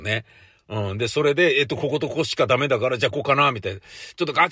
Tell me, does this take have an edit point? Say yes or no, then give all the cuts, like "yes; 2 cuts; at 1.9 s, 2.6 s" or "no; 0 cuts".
yes; 1 cut; at 3.1 s